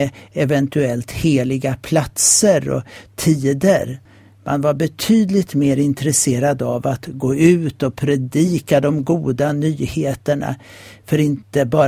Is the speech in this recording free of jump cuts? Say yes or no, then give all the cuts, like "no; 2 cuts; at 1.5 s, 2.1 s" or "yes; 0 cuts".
yes; 0 cuts